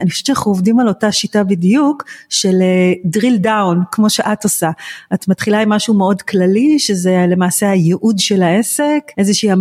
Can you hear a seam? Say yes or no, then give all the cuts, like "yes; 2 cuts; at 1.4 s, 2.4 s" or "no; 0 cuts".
no; 0 cuts